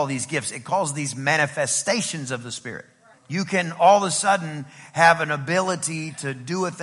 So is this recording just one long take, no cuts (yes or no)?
no